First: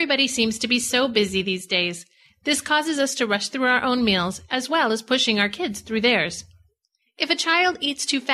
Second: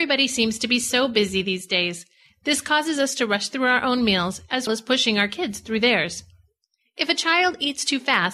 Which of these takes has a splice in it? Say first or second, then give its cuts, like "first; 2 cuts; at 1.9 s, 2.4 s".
second; 1 cut; at 4.7 s